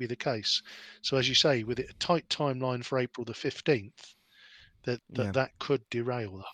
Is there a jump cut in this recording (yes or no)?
yes